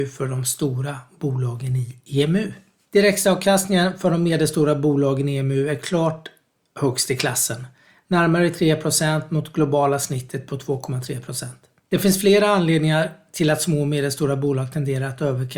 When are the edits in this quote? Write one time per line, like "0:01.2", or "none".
none